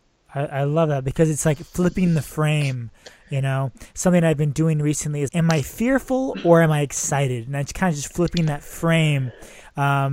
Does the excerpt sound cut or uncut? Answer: cut